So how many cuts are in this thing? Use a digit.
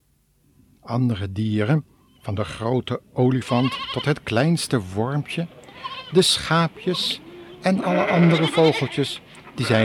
0